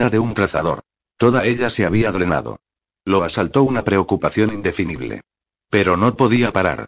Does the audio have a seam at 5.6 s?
yes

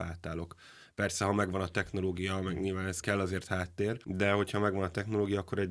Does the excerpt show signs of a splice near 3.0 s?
yes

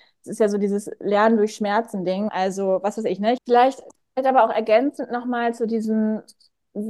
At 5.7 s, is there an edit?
no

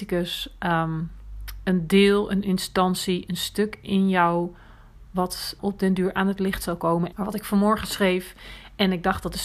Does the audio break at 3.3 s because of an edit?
no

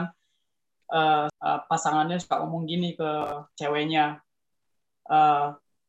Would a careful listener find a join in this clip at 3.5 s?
yes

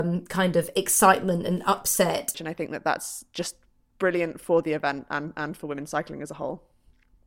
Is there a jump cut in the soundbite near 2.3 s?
yes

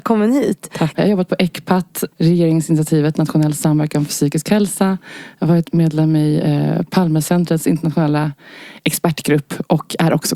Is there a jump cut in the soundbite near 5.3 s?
no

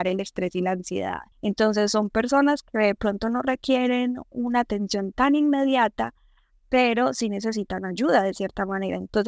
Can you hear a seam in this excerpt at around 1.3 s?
yes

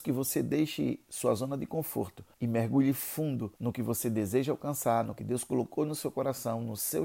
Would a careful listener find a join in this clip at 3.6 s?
yes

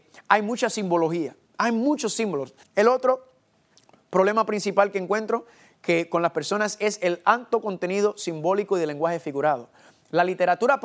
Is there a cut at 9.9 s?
no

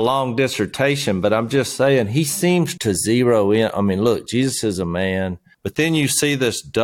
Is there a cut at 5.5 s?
yes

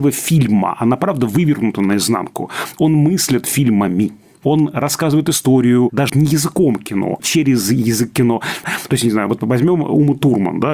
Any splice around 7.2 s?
yes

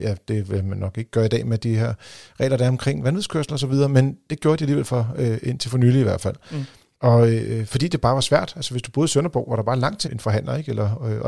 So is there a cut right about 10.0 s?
yes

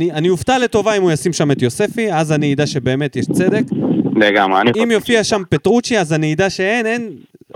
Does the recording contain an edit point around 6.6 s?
no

